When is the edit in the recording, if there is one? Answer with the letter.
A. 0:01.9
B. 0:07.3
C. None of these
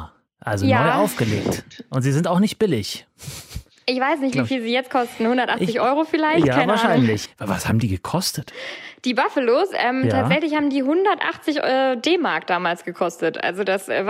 B